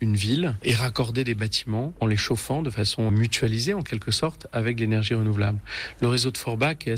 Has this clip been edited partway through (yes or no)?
yes